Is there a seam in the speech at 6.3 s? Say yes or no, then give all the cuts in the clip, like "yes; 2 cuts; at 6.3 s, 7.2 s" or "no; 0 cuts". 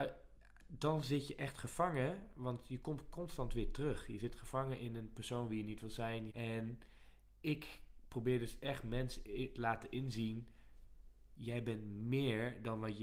yes; 1 cut; at 6.3 s